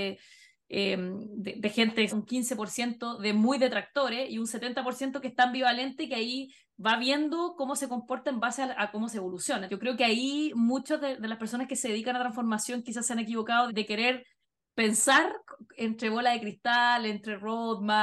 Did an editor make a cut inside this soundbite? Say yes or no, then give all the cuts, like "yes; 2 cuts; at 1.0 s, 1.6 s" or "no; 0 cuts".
yes; 3 cuts; at 2.1 s, 9.7 s, 13.7 s